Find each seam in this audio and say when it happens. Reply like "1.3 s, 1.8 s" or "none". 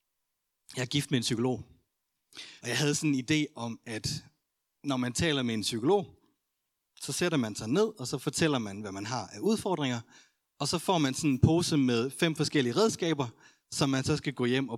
2.6 s